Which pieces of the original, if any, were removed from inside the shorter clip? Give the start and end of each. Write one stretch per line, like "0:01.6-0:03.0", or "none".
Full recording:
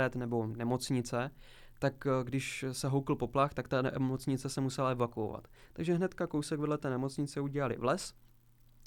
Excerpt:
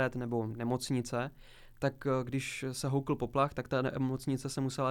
none